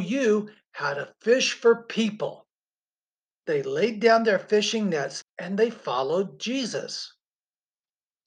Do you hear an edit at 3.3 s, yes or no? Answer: yes